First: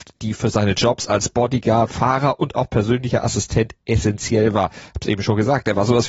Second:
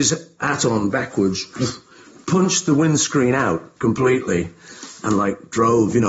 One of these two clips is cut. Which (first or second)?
first